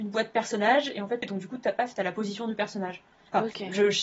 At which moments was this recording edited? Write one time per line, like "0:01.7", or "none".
0:01.2